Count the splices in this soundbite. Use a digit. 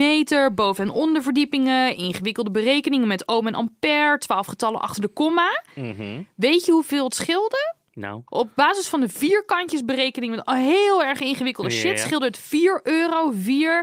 1